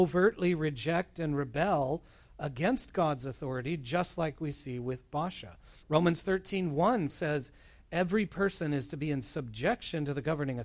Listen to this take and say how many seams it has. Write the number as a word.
two